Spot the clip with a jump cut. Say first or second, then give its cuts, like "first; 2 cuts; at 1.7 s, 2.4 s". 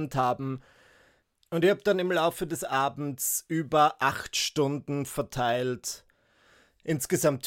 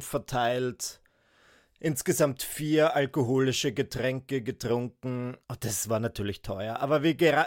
second; 1 cut; at 5.4 s